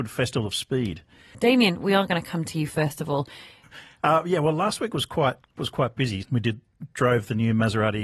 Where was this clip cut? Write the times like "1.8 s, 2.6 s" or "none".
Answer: 1.3 s, 3.6 s, 6.2 s